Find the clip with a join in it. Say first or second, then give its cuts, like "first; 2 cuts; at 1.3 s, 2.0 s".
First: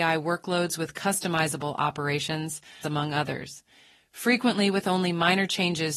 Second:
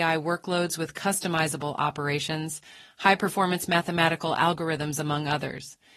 first; 1 cut; at 2.8 s